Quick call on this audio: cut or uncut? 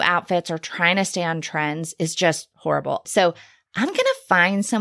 cut